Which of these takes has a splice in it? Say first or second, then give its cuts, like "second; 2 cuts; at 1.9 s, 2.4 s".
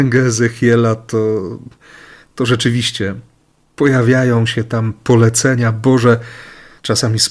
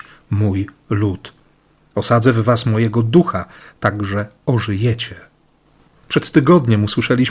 second; 1 cut; at 6.1 s